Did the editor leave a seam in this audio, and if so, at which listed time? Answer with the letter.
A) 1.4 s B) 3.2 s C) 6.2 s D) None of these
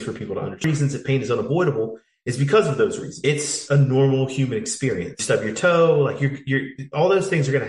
D